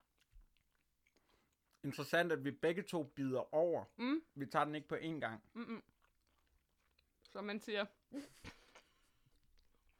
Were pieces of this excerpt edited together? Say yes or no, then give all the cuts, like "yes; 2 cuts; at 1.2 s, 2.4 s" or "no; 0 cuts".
no; 0 cuts